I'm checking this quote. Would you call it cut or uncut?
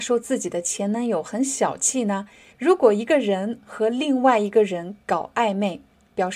cut